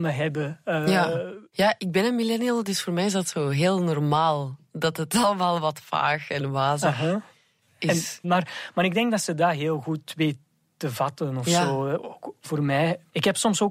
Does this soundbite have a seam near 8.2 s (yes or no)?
yes